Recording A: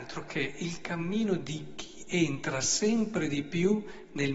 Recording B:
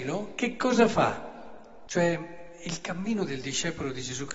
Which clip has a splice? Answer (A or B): B